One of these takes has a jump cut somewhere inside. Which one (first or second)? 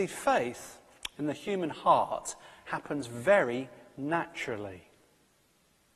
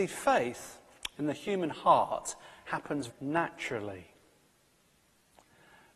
second